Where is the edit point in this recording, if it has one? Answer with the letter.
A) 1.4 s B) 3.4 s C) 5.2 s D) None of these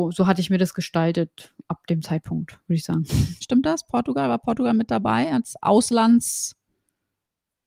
B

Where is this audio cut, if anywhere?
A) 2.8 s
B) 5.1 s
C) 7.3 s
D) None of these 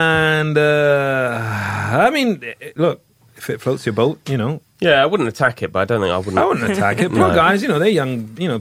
A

